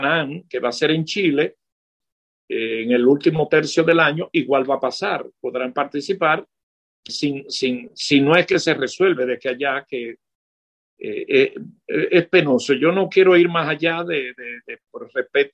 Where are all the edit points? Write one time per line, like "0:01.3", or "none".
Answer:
0:07.1